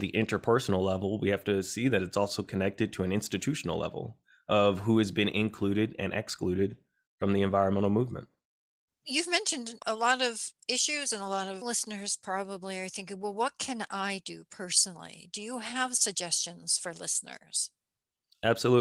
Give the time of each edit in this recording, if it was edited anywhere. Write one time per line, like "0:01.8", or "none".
none